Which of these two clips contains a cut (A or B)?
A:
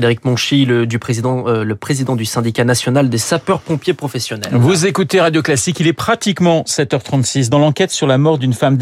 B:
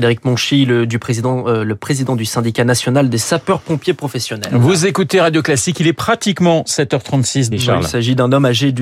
B